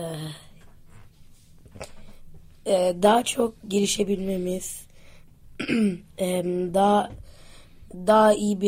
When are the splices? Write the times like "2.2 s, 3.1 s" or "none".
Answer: none